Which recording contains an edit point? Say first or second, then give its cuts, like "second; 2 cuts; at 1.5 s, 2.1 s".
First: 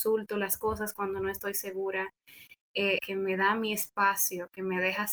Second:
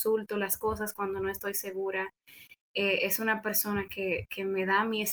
first; 1 cut; at 3.0 s